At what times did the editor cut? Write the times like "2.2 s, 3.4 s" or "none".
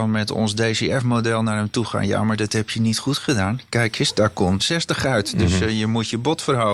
4.6 s